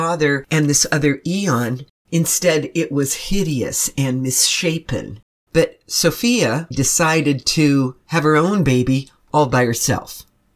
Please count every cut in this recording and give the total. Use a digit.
3